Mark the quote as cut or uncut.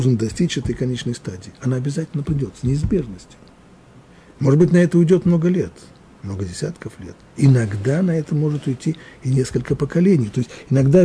uncut